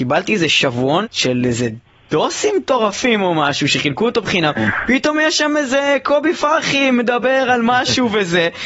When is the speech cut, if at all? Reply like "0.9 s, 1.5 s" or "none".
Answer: 1.0 s